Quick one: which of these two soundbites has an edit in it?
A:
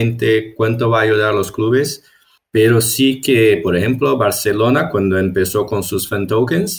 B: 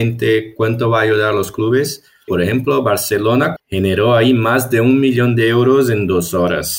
B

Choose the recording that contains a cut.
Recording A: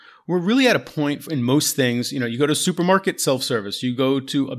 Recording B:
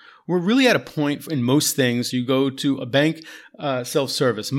B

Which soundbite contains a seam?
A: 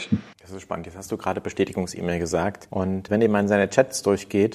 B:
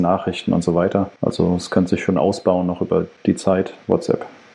A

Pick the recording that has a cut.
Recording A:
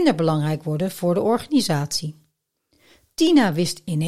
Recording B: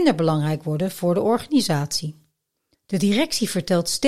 B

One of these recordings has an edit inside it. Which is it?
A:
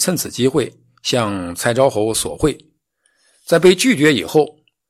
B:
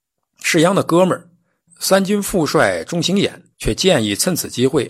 B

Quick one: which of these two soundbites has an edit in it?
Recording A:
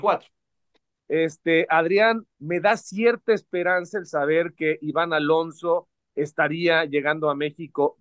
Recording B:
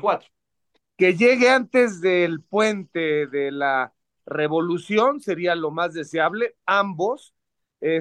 A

